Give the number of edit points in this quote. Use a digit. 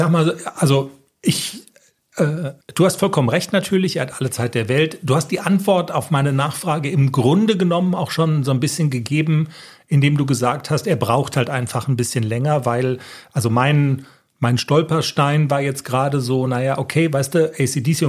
1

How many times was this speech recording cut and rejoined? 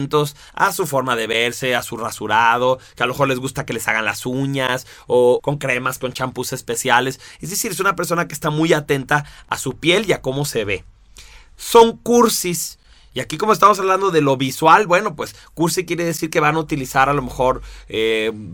1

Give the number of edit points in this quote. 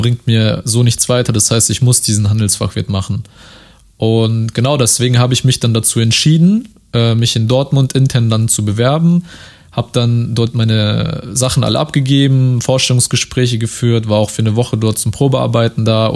0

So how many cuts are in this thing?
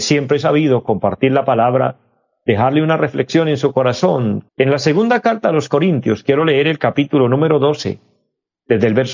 1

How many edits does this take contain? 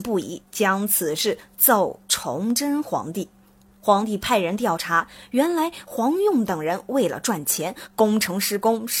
0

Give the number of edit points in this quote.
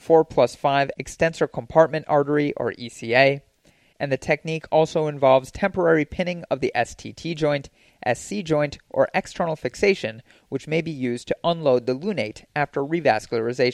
0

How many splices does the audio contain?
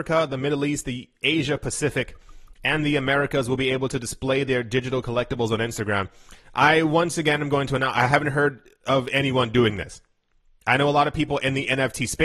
0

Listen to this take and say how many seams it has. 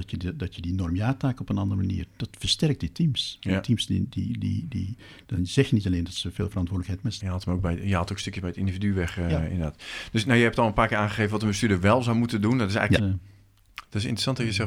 2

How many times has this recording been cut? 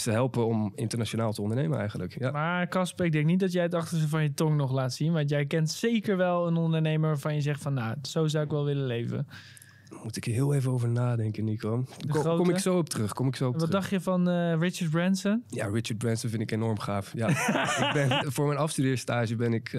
1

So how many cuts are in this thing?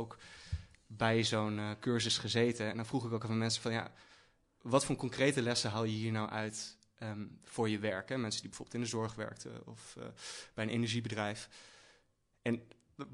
0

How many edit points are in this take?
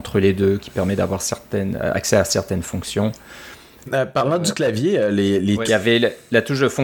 2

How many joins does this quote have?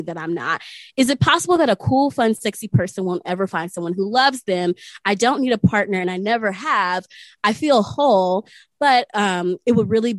0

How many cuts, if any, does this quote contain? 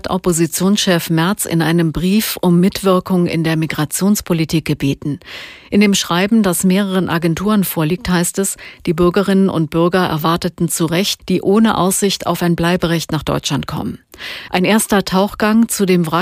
2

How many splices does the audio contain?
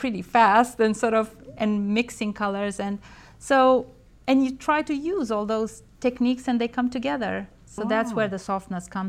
1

